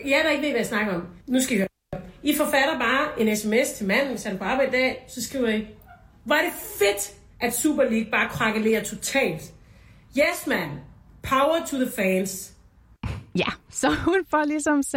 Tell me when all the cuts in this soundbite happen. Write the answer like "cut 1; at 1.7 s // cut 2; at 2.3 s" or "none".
cut 1; at 1.2 s